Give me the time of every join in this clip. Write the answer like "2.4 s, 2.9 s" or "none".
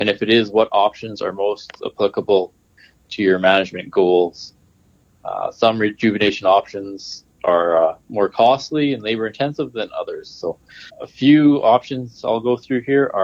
10.9 s

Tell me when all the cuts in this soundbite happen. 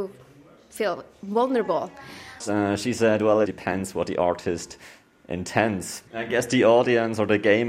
2.4 s, 6.1 s

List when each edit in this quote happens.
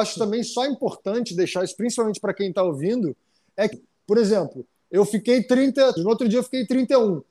3.7 s, 6.0 s

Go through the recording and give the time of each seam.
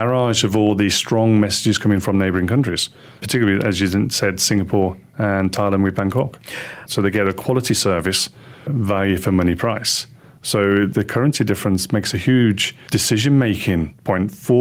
6.9 s

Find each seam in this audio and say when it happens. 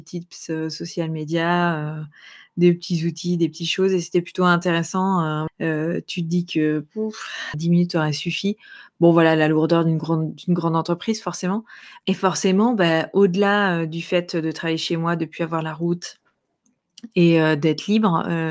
5.5 s, 7.5 s, 12.0 s

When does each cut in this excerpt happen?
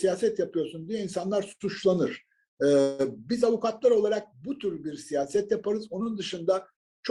none

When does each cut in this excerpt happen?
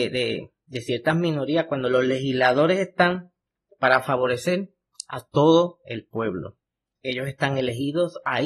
7.0 s

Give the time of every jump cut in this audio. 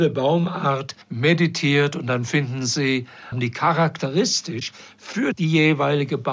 1.0 s, 3.3 s

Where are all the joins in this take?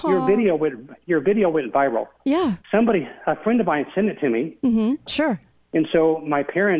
2.6 s, 5.1 s

